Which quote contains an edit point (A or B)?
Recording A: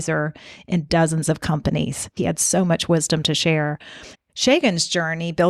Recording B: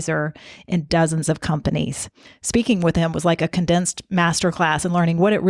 A